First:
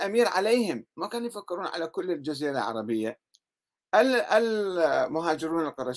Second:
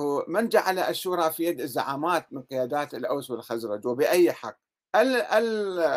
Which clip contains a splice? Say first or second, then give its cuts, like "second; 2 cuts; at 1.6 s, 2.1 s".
second; 1 cut; at 4.8 s